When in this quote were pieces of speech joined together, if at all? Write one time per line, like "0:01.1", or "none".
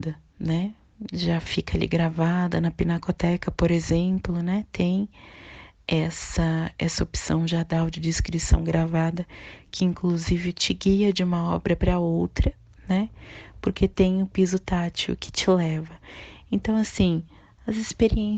none